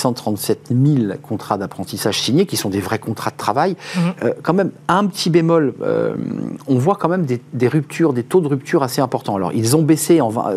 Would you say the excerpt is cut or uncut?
uncut